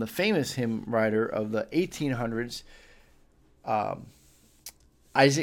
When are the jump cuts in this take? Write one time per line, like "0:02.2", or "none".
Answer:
none